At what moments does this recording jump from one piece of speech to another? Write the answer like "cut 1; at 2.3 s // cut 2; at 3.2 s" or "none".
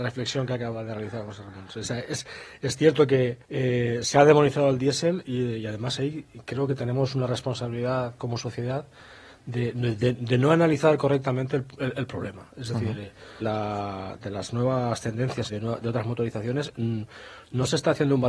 cut 1; at 3.4 s // cut 2; at 13.4 s // cut 3; at 15.5 s